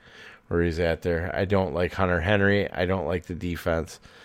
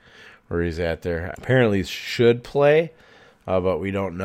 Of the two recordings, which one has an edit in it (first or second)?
second